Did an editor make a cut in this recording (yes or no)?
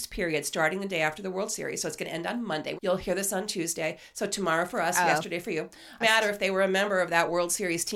yes